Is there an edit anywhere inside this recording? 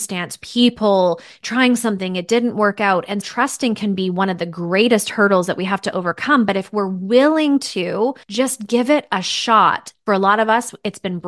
yes; 3 cuts; at 3.2 s, 8.2 s, 9.9 s

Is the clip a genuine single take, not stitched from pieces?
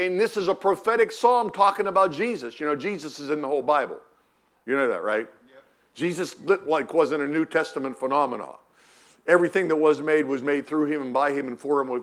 yes; 0 cuts

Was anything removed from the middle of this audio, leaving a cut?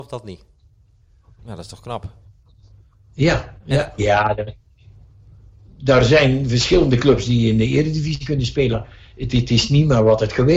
yes; 3 cuts; at 1.4 s, 4.0 s, 8.7 s

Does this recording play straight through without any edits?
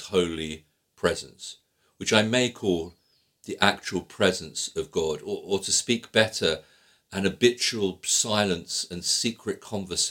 yes; 0 cuts

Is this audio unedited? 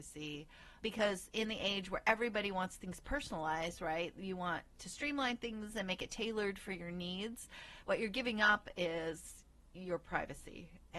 yes; 0 cuts

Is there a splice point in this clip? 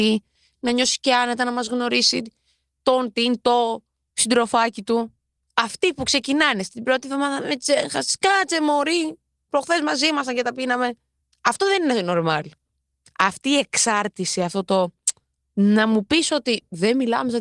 no; 0 cuts

